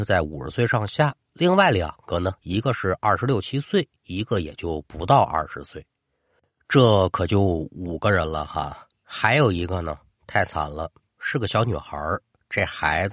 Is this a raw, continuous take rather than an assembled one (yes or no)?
yes